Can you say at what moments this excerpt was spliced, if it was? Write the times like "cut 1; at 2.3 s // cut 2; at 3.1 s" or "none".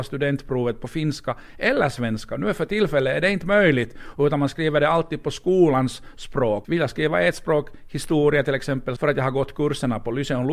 cut 1; at 6.6 s // cut 2; at 9.0 s